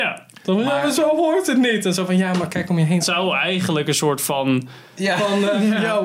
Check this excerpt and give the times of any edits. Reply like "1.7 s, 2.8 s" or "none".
3.0 s, 4.9 s